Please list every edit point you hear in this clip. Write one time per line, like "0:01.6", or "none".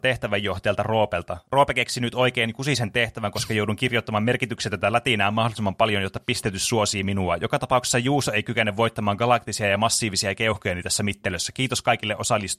none